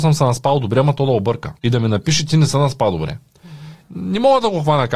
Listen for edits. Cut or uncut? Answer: cut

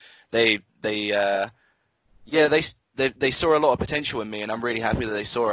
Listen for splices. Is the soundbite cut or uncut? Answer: uncut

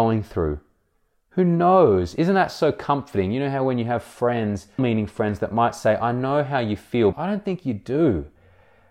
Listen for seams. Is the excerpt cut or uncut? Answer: cut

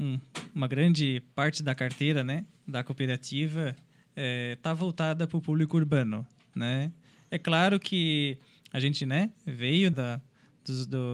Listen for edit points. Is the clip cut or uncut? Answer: cut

